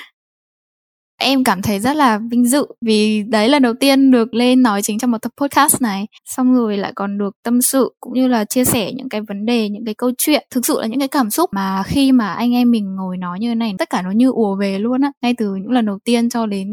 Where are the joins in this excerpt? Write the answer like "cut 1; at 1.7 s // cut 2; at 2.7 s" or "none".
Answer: cut 1; at 6.2 s